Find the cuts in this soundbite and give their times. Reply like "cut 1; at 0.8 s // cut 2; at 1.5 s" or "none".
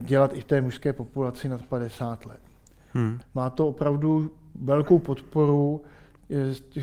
cut 1; at 3.2 s